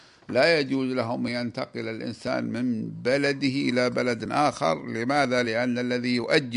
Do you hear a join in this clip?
no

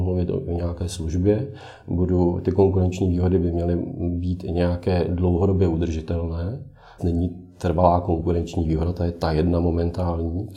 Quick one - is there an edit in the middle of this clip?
yes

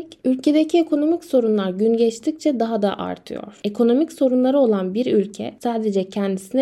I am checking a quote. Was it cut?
no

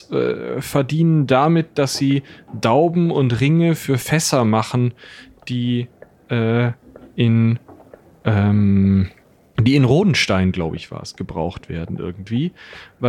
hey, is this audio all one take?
yes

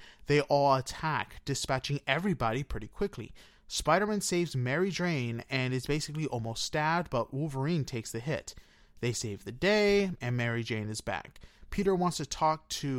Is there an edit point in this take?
no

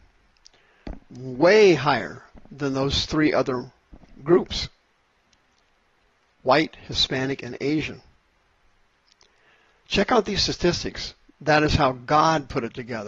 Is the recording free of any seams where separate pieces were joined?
no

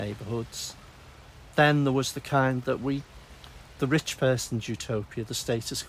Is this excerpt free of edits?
yes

